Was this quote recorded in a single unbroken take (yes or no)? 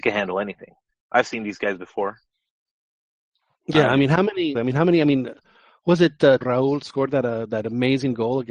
no